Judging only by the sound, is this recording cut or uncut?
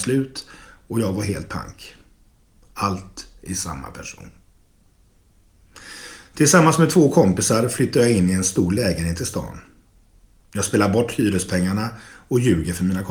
cut